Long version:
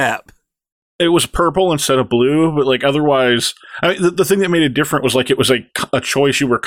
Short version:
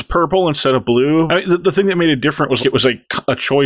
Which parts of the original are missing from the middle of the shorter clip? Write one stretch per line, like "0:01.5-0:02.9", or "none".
0:02.5-0:03.8
0:05.1-0:05.2